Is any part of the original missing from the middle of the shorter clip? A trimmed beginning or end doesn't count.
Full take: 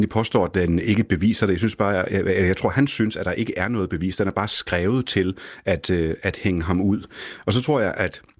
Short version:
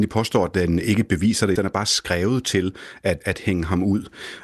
yes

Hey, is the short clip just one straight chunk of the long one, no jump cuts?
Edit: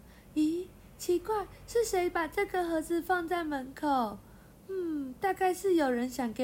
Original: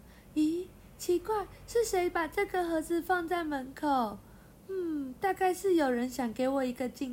yes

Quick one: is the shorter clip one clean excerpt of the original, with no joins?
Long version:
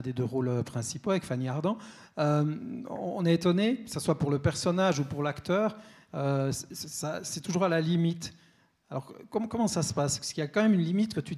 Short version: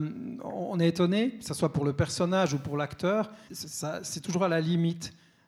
no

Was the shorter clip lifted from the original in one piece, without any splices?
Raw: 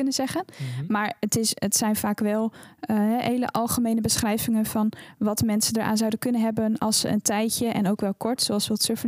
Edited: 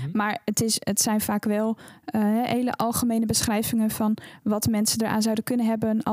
yes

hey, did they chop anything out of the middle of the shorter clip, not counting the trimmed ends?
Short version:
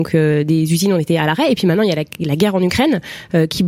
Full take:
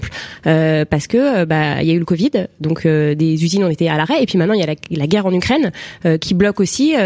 no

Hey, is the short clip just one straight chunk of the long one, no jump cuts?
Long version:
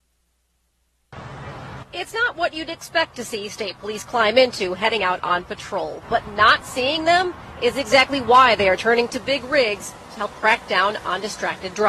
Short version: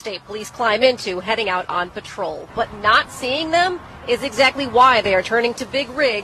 yes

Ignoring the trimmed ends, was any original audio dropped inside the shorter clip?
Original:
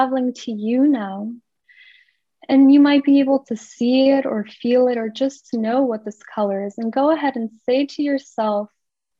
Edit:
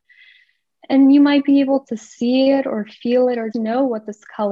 yes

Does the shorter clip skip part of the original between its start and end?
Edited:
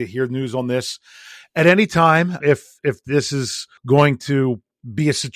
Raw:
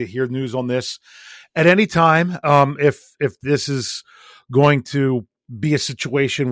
yes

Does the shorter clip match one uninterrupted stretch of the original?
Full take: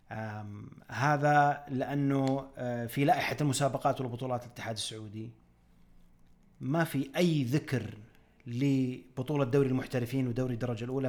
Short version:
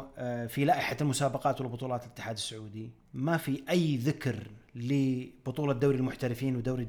no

